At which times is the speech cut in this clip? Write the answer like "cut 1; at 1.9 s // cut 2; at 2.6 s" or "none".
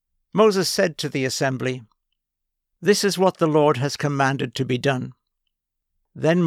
none